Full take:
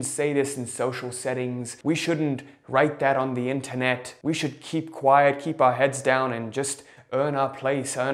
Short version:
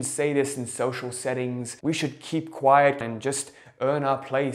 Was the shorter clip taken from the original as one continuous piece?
no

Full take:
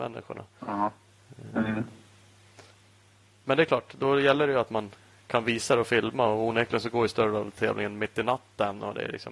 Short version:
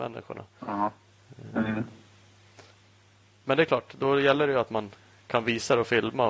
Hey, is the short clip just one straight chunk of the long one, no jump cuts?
yes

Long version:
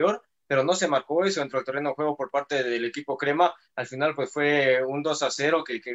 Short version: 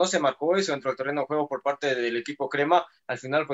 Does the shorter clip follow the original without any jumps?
yes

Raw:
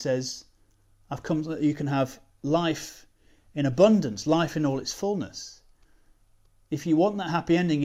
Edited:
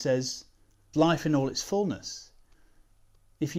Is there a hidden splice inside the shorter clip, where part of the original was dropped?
yes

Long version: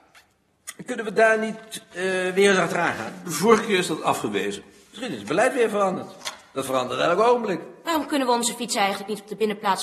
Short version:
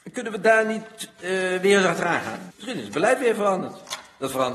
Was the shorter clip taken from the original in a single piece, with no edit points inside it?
no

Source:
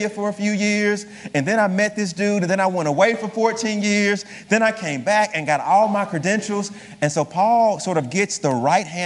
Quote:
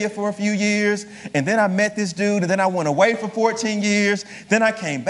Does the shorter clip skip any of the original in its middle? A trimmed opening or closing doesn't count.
no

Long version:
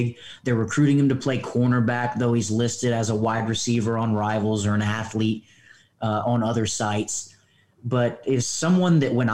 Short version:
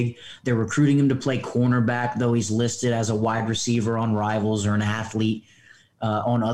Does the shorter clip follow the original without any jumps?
yes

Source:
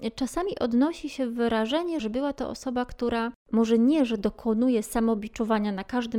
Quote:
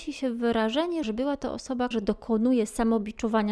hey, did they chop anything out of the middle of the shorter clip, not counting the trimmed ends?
yes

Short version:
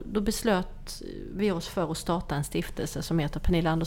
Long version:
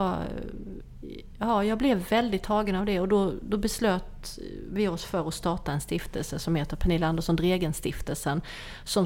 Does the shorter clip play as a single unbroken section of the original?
yes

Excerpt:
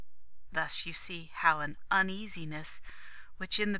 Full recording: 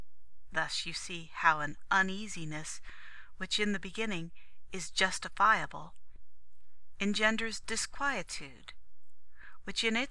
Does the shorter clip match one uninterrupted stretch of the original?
yes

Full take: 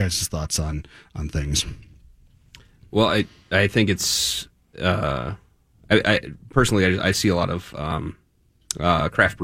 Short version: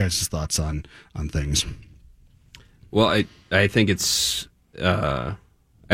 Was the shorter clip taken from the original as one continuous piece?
yes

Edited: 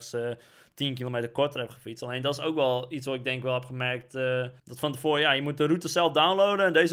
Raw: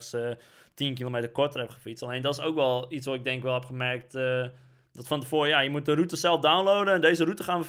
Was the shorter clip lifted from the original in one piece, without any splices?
no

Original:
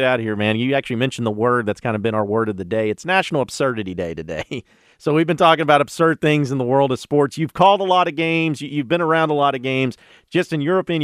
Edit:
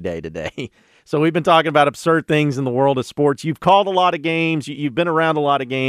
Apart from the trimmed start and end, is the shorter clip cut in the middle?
no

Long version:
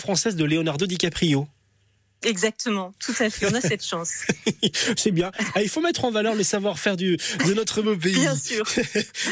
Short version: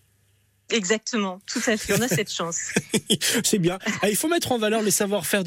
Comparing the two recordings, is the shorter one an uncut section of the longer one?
yes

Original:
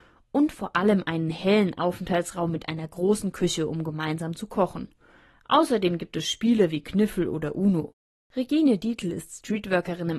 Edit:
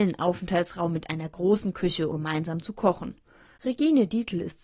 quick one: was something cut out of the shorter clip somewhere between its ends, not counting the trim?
yes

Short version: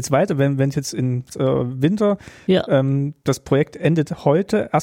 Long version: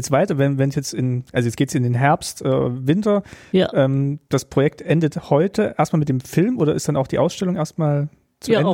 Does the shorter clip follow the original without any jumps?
no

